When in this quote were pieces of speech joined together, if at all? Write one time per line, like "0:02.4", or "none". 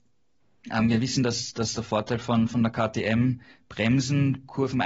none